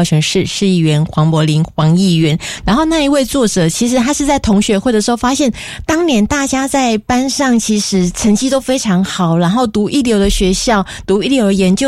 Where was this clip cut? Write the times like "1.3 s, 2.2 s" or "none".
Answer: 2.6 s